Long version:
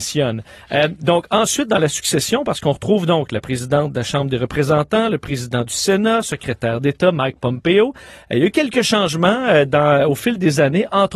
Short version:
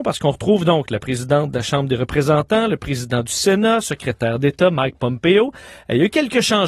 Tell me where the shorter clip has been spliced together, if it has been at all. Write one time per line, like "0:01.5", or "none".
none